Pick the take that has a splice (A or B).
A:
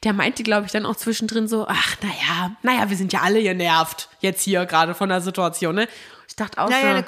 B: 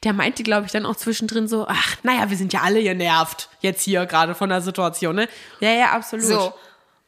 B